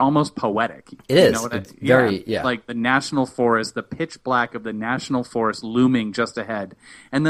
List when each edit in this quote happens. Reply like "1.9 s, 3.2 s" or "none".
none